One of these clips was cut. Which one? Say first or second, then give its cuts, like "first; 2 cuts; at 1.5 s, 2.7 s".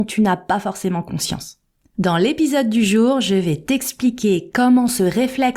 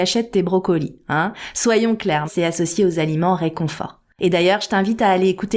second; 2 cuts; at 2.3 s, 4.2 s